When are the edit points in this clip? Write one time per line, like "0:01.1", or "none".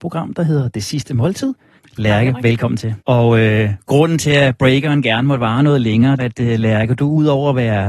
0:01.8
0:03.0
0:06.2